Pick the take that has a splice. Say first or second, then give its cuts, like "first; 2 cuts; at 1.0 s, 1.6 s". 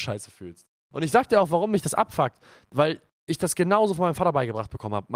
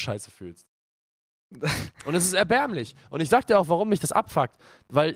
first; 1 cut; at 0.9 s